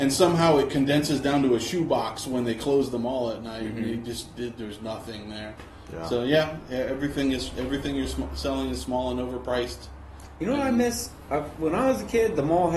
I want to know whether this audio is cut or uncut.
uncut